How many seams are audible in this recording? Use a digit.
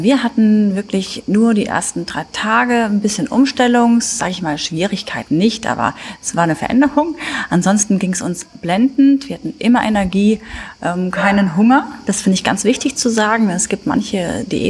0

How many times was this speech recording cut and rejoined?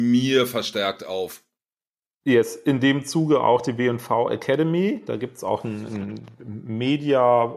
0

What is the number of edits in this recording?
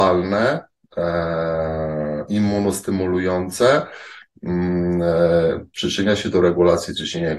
1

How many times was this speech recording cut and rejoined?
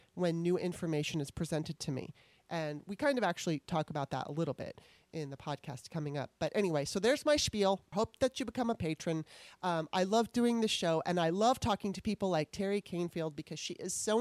1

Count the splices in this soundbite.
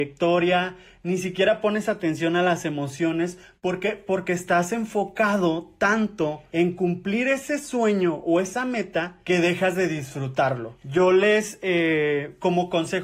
0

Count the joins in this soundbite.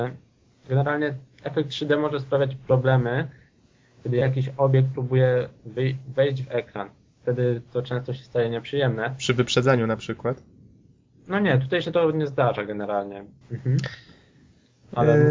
1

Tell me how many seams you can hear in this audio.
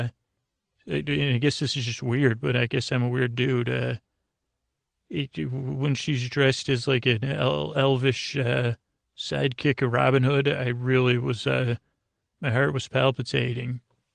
0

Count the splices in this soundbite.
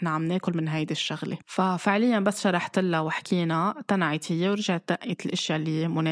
1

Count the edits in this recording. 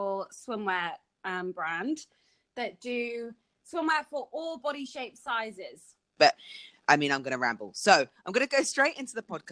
1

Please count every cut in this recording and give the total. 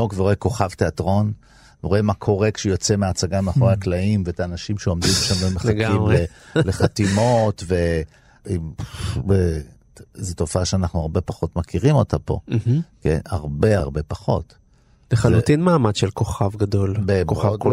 1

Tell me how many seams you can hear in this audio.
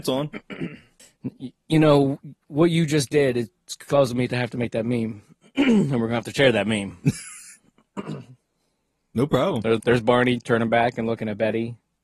1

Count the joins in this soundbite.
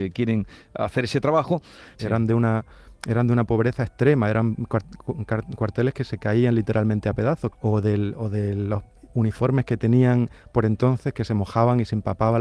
2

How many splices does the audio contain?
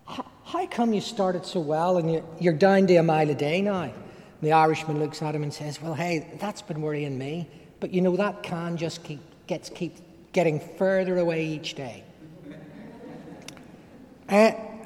0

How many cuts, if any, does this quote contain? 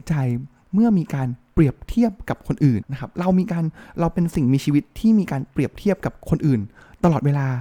1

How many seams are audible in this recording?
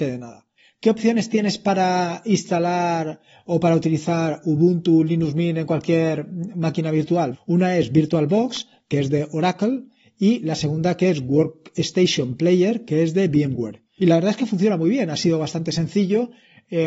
2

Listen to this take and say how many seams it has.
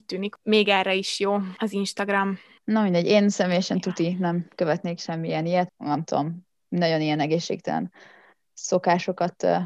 1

